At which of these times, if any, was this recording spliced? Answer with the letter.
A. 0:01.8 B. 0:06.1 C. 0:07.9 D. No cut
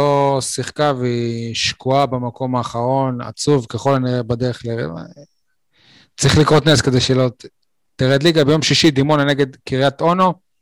C